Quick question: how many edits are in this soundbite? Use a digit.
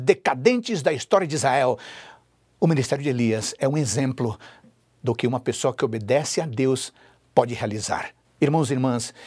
1